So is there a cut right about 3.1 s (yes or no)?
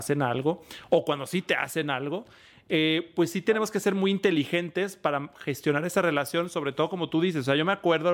no